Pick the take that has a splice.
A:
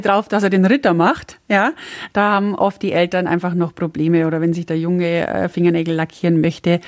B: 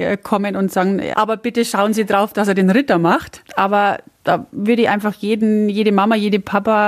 B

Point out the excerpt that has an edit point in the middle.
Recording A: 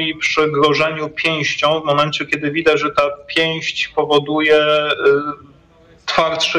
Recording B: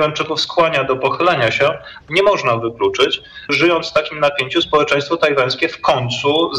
B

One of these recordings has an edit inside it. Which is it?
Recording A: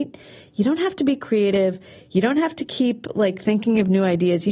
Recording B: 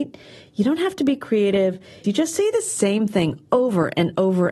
B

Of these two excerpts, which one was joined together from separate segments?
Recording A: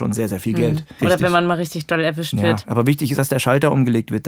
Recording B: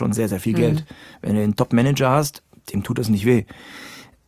A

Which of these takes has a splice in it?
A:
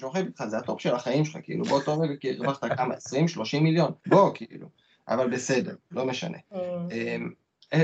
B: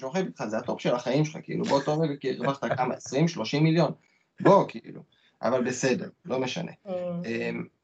A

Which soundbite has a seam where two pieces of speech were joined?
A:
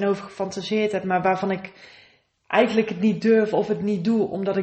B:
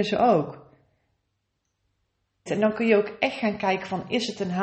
B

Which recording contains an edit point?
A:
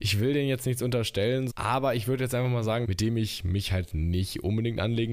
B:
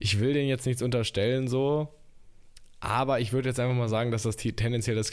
A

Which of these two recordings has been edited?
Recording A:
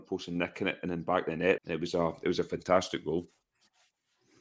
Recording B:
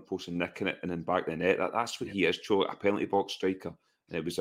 A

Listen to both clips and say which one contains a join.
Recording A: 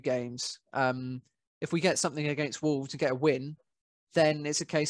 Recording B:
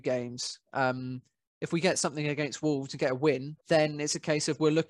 B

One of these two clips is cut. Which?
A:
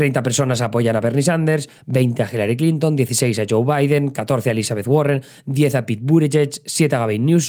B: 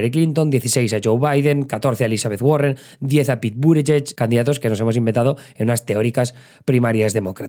B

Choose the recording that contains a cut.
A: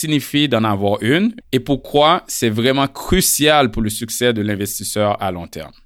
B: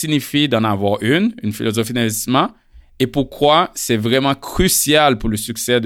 A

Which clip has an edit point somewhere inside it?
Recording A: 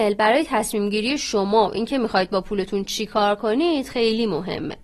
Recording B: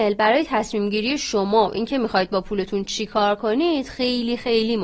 A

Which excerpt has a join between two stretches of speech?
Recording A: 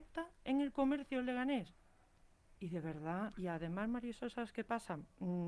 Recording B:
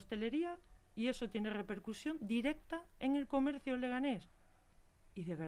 A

